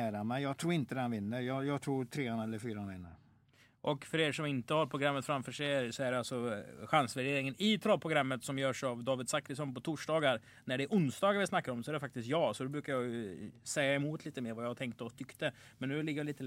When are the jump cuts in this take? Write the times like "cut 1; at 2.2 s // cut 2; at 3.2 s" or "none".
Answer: none